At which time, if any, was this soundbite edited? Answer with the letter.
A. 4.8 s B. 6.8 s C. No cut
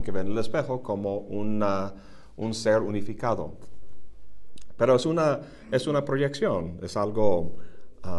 C